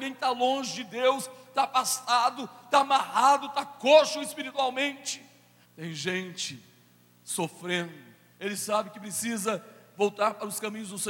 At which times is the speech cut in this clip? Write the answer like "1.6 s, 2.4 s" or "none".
5.6 s, 8.3 s